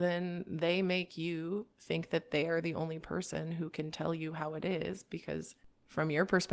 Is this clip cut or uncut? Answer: uncut